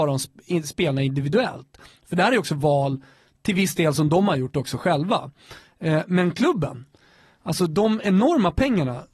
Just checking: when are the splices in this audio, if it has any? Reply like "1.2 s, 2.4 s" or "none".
none